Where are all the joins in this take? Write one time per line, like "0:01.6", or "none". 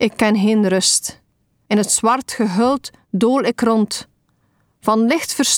0:01.7